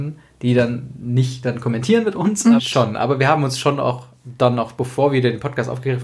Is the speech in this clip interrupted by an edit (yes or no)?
yes